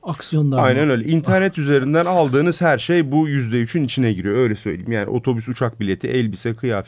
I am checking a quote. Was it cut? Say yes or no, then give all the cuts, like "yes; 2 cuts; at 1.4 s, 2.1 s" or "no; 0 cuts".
no; 0 cuts